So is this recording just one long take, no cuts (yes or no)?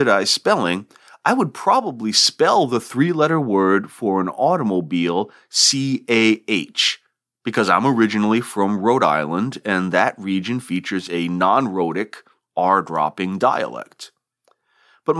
yes